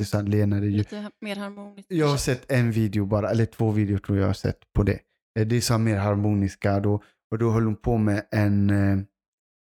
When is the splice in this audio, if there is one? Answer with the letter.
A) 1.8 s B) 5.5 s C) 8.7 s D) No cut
D